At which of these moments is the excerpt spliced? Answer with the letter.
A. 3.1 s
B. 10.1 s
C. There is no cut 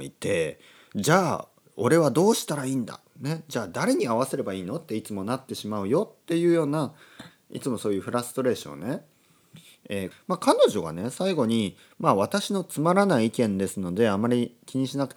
B